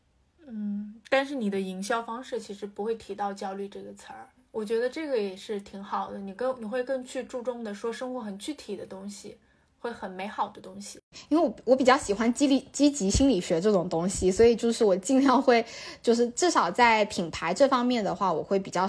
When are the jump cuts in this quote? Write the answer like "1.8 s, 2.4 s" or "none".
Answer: none

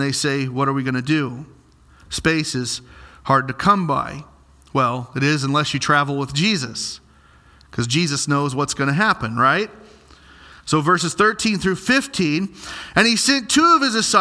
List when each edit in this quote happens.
none

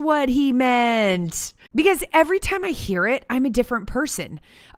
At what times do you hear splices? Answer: 1.7 s

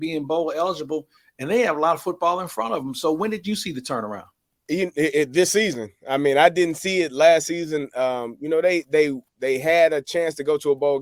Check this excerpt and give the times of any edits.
none

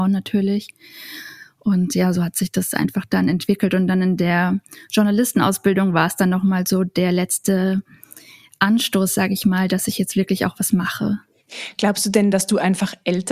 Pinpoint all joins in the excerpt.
none

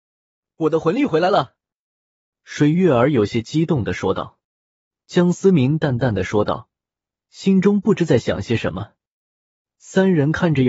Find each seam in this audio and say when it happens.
4.4 s

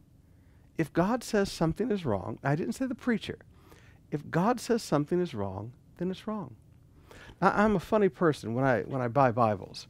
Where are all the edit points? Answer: none

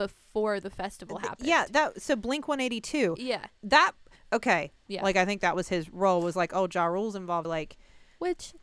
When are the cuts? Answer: 4.9 s, 7.4 s

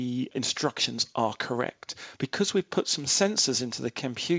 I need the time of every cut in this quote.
2.2 s

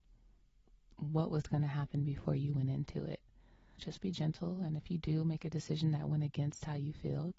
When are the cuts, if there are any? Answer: 3.8 s

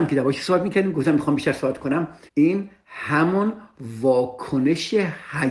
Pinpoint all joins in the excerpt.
2.3 s

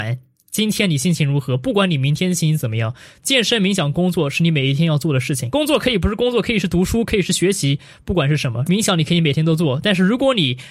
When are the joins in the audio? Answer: 8.6 s

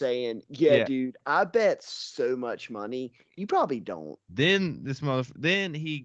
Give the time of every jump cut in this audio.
4.3 s

